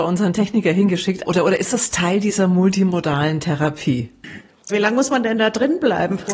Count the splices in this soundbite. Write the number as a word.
two